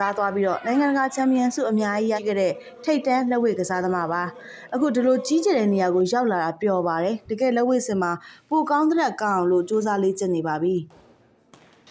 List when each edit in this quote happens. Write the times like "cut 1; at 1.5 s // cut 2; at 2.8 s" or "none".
cut 1; at 2.2 s